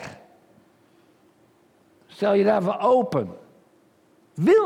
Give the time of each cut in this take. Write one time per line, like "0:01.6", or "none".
none

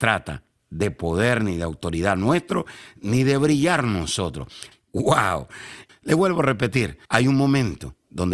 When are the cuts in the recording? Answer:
0:04.7
0:05.9
0:07.0

